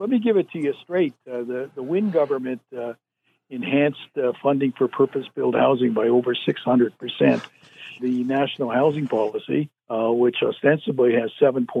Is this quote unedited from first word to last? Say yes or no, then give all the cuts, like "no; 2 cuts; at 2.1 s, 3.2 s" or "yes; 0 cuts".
no; 2 cuts; at 8.0 s, 9.8 s